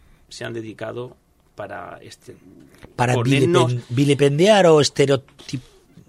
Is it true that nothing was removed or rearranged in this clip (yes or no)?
no